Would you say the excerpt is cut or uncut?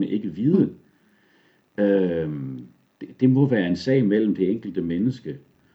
uncut